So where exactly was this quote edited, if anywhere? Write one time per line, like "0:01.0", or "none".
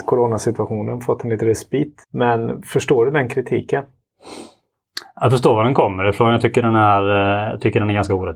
0:02.0